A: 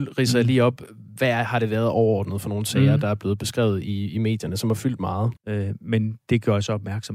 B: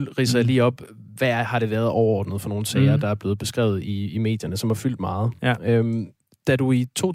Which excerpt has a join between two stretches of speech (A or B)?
A